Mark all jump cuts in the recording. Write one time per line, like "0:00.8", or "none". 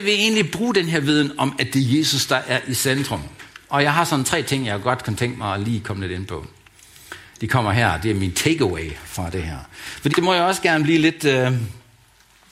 0:10.1